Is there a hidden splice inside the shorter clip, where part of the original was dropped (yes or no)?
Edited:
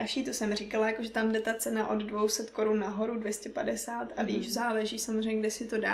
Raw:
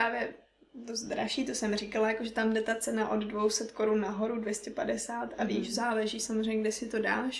no